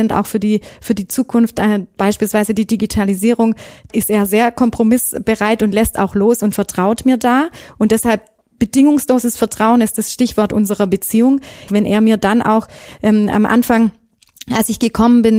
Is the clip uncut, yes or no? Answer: no